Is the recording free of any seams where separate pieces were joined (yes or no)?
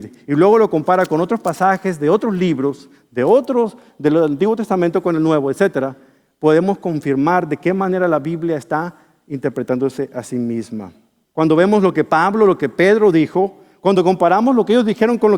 no